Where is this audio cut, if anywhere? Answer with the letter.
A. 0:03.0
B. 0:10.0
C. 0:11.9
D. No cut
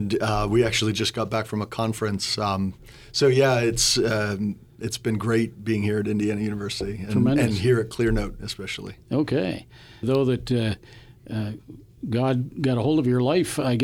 B